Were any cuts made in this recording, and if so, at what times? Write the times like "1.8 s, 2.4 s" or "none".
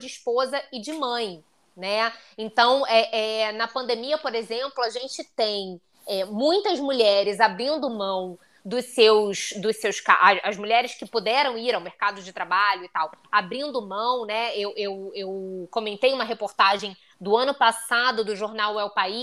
none